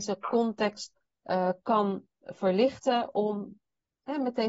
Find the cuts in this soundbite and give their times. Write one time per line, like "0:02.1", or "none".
none